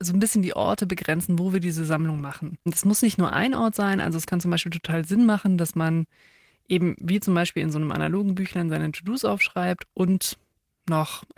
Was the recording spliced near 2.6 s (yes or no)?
yes